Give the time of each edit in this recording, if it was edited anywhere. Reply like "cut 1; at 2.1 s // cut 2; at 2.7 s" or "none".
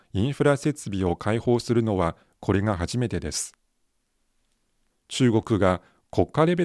cut 1; at 4.9 s